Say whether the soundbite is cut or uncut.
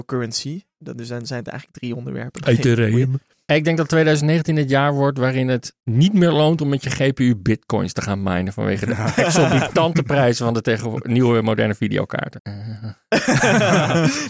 cut